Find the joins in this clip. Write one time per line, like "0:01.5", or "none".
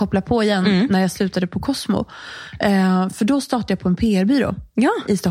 none